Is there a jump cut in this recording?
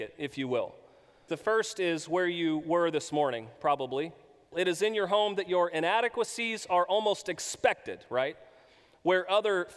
yes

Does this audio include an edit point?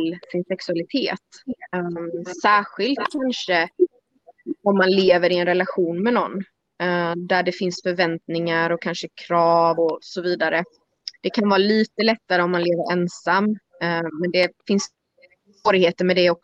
yes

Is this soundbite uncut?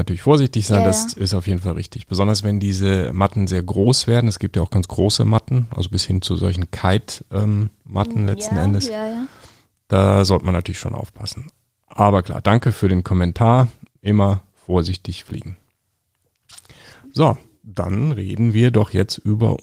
yes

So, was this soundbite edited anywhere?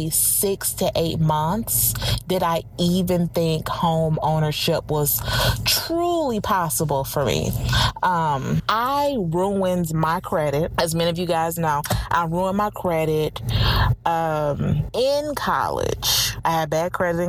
no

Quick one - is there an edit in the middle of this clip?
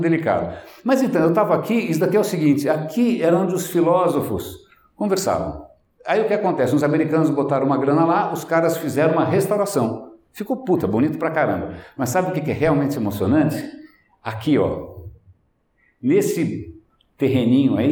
no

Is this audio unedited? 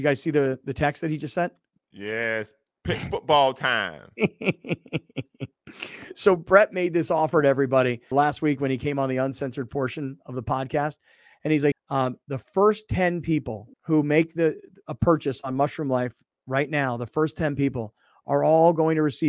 no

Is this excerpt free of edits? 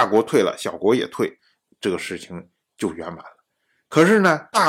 yes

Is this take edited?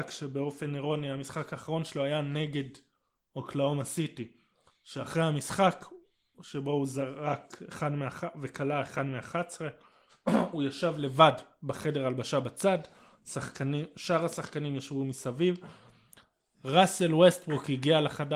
no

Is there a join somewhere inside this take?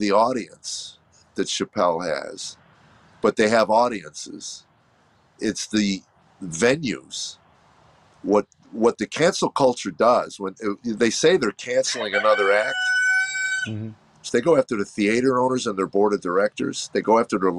yes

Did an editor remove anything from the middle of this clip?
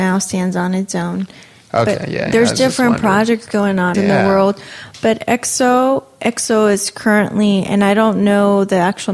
yes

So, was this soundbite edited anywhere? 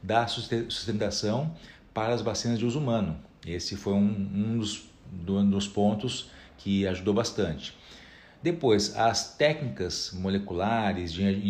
no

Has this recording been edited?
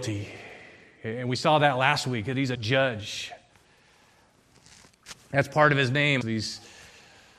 yes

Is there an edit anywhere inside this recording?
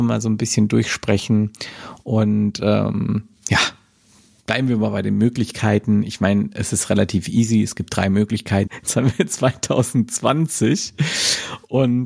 yes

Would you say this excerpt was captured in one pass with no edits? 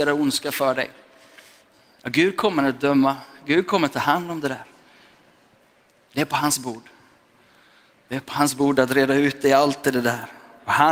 yes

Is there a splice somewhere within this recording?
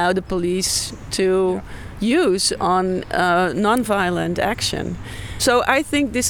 no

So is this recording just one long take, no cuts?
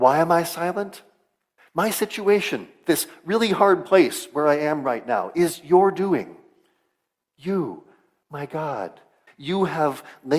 no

